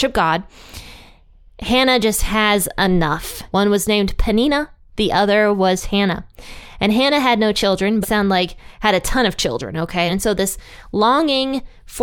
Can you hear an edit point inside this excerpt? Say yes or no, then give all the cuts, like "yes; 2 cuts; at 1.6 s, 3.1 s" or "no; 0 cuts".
yes; 3 cuts; at 3.5 s, 8.0 s, 10.1 s